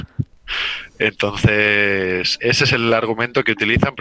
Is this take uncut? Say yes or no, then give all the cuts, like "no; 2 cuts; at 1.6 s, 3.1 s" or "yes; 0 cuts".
no; 1 cut; at 2.4 s